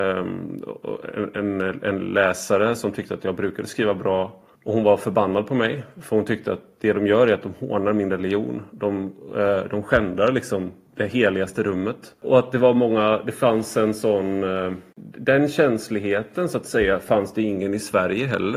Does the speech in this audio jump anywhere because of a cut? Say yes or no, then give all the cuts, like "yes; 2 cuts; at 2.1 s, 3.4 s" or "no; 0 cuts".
no; 0 cuts